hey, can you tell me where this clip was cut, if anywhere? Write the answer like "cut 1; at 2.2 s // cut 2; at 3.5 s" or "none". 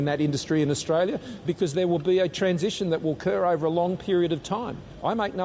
cut 1; at 1.4 s